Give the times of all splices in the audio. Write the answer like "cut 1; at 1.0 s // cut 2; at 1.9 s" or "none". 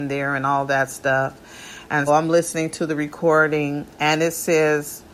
cut 1; at 2.1 s // cut 2; at 3.9 s